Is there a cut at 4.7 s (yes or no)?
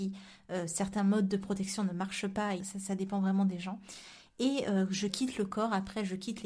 no